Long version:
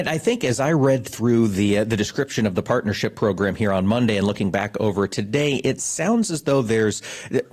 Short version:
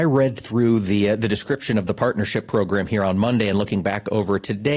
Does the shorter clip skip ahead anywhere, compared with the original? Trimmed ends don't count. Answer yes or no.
no